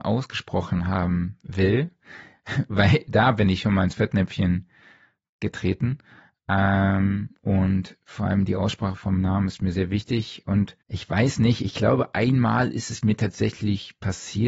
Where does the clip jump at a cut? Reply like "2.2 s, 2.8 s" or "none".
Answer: 10.8 s